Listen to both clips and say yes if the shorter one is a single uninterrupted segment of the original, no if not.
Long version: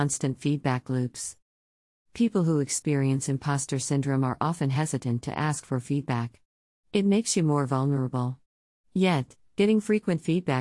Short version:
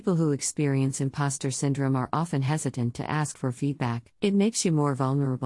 no